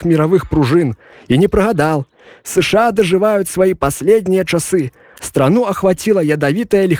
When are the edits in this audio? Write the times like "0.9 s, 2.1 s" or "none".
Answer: 5.2 s